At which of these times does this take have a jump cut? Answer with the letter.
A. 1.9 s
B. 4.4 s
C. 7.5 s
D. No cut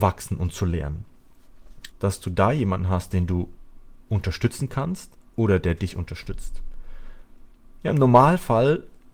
A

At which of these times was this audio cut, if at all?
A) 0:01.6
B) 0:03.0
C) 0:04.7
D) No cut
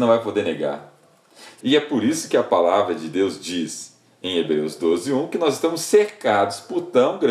A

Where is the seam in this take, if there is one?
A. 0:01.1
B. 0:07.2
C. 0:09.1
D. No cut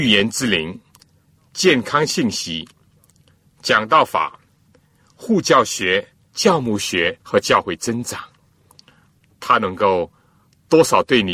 B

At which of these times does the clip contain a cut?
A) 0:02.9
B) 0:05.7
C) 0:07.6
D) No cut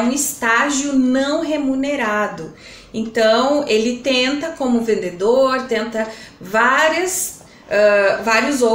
D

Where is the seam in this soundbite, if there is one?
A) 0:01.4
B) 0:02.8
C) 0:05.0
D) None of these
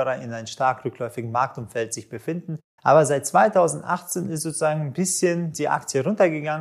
B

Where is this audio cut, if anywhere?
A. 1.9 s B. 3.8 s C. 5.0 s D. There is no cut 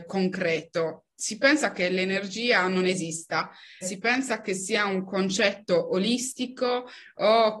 B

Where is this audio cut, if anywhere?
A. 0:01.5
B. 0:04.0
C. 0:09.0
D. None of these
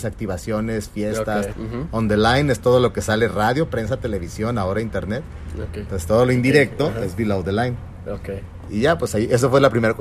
A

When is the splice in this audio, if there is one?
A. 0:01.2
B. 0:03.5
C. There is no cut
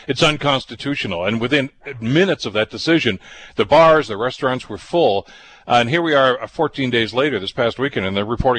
C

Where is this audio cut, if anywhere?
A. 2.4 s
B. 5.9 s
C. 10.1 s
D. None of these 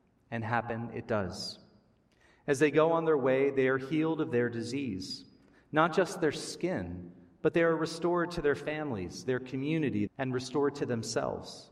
C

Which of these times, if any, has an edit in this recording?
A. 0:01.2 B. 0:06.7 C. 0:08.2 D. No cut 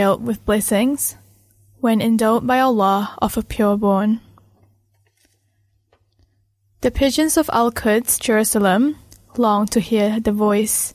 D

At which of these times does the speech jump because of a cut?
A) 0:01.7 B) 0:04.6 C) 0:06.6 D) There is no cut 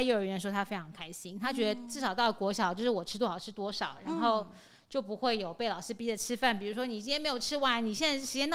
D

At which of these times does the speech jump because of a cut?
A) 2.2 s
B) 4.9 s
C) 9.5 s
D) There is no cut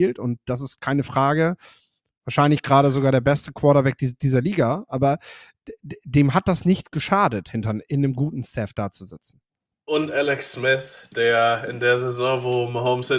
D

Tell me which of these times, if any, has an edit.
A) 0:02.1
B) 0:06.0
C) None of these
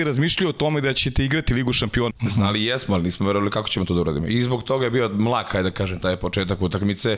A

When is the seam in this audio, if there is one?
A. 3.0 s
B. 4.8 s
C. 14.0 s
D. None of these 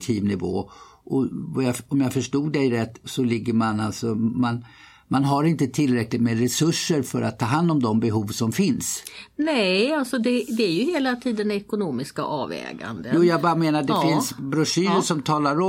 A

